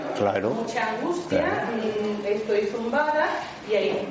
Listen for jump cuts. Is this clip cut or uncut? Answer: uncut